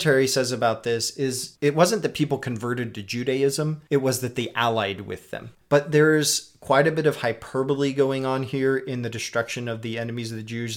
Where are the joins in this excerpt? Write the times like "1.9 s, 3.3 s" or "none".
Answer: none